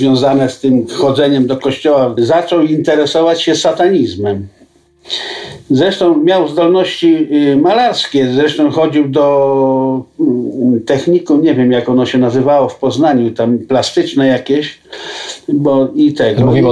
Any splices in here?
yes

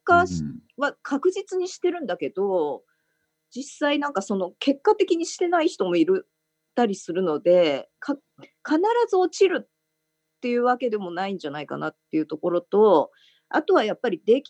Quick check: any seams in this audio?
no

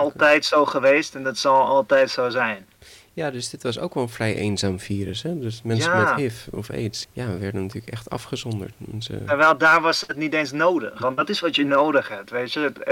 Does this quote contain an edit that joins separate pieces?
yes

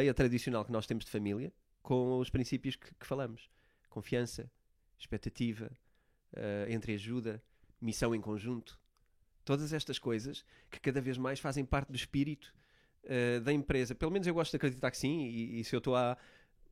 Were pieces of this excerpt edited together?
no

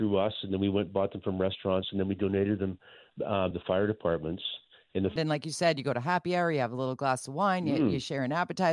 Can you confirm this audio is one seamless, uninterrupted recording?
no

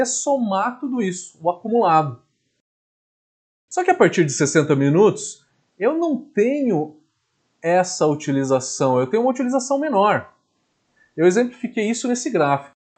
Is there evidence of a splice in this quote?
no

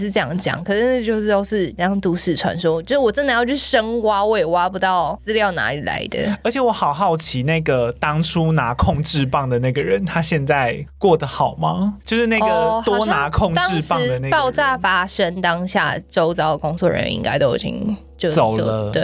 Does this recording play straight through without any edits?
yes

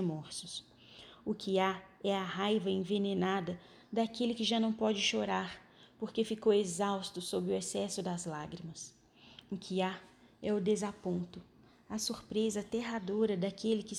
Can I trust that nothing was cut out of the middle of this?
yes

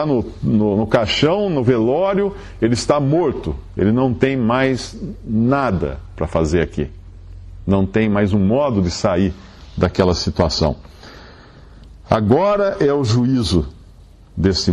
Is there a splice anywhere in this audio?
no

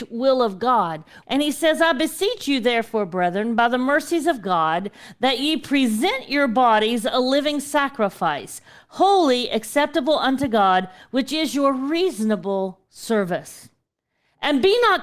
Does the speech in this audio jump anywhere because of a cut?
yes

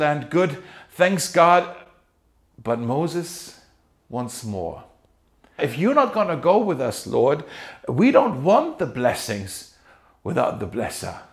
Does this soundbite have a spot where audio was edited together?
yes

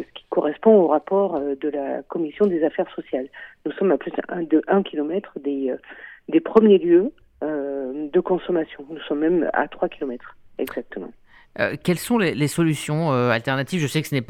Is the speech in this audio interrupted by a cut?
no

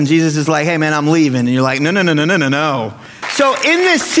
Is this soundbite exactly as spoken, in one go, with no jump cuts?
no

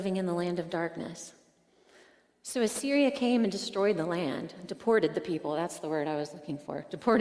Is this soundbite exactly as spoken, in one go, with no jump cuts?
yes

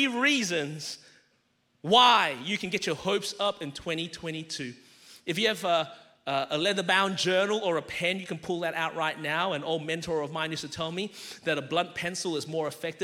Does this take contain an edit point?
no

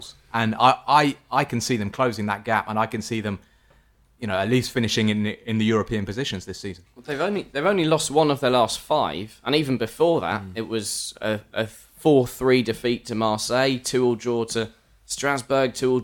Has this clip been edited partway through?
no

